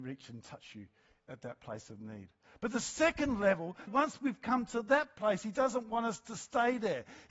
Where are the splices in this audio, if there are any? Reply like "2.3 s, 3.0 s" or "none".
3.9 s